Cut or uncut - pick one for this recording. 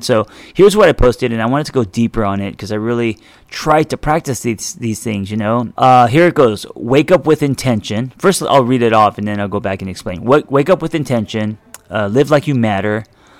cut